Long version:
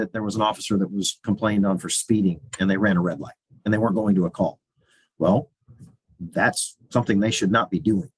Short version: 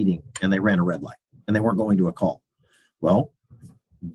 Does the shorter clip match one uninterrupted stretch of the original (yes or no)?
yes